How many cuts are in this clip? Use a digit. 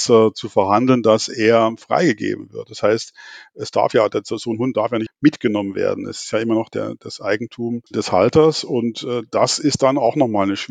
2